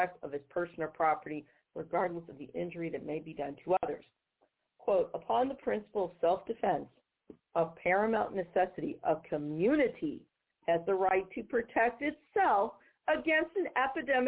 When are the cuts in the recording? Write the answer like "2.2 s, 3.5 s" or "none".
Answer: none